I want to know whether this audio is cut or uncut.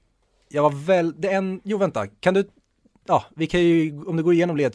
uncut